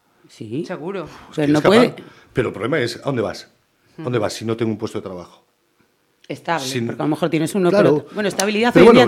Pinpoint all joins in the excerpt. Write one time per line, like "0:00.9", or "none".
none